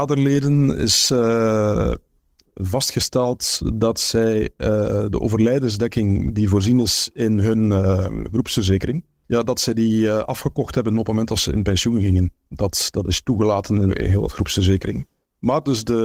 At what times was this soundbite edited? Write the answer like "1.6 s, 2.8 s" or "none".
none

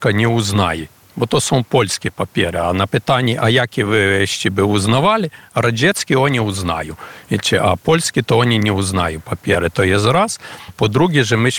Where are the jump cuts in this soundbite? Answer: 10.7 s

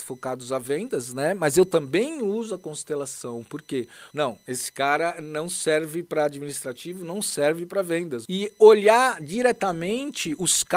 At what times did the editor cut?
4.1 s, 8.2 s

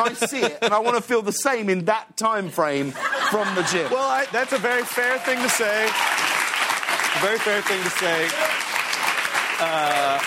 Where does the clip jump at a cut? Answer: none

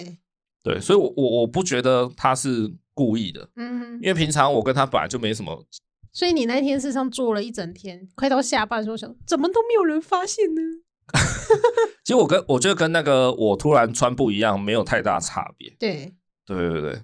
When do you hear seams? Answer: 6.1 s

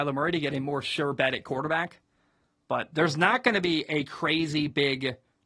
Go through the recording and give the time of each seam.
none

